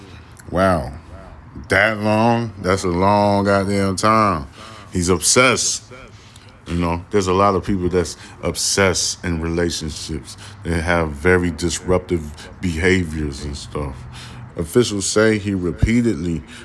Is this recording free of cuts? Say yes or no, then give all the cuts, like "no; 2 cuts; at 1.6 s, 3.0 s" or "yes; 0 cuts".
no; 1 cut; at 14.5 s